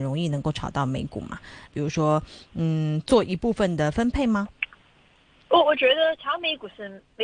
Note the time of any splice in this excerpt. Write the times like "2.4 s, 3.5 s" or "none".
1.7 s